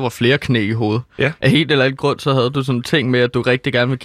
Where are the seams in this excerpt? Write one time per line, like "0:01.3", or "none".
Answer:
none